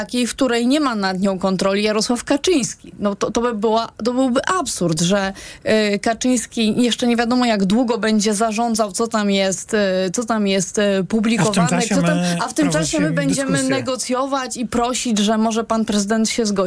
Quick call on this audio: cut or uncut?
uncut